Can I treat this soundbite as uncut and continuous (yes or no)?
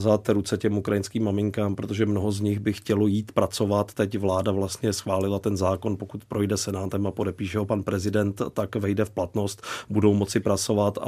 yes